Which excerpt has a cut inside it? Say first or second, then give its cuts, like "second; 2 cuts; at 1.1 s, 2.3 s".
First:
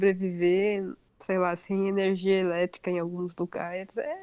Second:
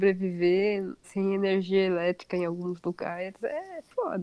second; 1 cut; at 1.0 s